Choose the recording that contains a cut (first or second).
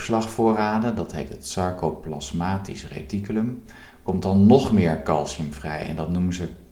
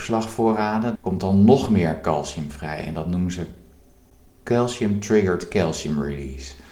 second